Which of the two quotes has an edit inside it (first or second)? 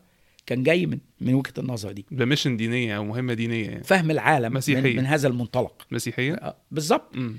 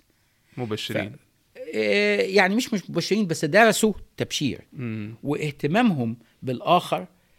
first